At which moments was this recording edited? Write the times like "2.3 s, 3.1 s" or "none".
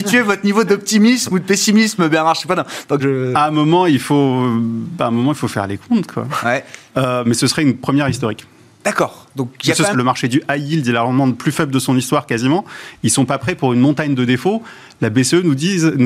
3.0 s, 6.4 s, 9.9 s